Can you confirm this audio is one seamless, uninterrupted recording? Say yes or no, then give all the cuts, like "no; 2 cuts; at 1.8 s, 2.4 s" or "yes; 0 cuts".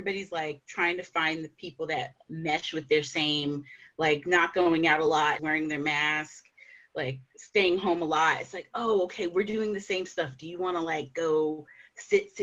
no; 1 cut; at 5.4 s